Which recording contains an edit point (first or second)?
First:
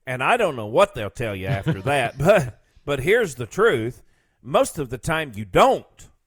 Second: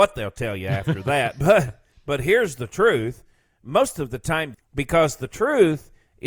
second